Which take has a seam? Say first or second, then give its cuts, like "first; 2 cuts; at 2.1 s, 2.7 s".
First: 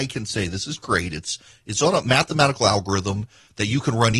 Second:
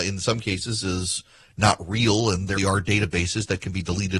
second; 1 cut; at 2.6 s